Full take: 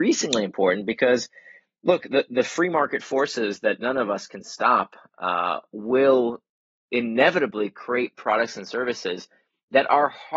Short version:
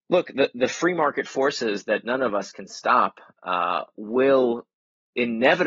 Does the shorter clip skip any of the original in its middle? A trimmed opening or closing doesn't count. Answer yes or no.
no